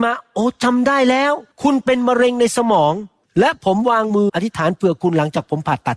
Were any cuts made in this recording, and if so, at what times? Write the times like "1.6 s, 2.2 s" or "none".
1.5 s, 4.3 s